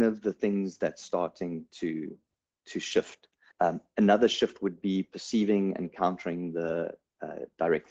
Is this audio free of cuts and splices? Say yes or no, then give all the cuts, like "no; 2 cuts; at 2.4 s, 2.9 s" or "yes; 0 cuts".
no; 1 cut; at 3.5 s